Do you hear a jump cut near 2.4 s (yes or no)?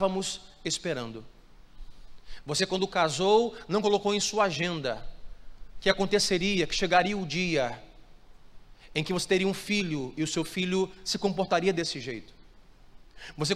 yes